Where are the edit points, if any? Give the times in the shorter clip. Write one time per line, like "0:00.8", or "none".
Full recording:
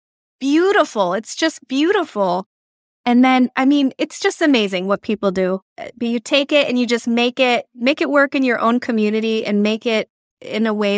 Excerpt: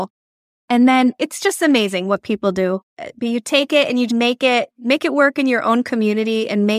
0:01.2
0:04.1